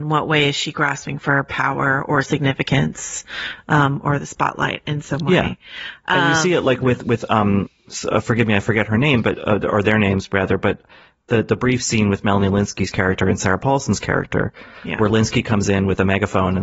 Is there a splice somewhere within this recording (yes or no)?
no